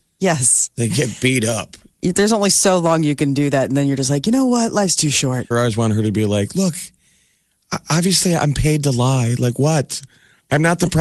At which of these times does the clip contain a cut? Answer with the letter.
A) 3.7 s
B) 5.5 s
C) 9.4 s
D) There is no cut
B